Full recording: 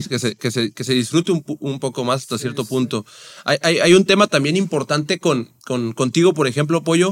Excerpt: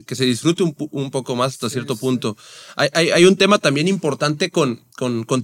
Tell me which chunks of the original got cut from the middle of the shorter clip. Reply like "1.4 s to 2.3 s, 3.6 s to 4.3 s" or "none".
none